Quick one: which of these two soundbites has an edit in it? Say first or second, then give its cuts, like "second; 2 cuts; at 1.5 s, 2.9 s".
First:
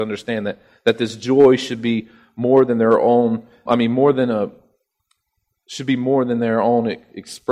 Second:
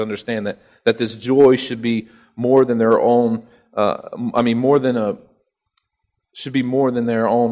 first; 1 cut; at 3.7 s